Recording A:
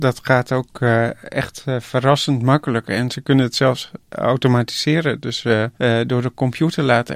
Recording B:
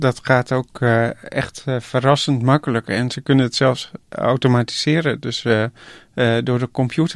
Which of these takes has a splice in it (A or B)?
A